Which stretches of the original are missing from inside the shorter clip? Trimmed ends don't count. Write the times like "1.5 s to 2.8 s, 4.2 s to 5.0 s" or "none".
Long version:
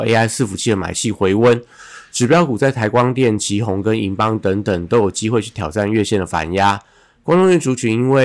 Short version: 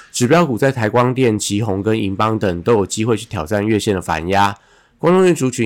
4.4 s to 4.6 s